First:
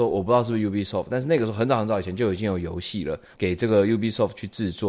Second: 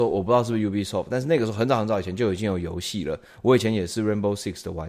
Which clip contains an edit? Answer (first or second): first